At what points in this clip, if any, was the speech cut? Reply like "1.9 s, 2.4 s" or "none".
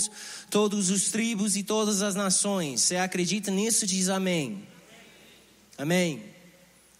none